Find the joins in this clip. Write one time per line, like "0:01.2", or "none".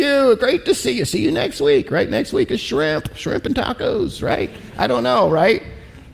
none